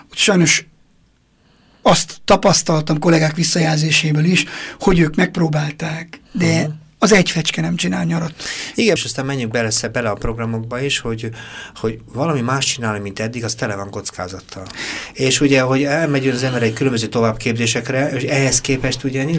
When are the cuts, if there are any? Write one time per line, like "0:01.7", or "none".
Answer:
0:06.3
0:09.0